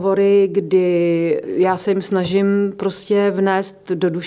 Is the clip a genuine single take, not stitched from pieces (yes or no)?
no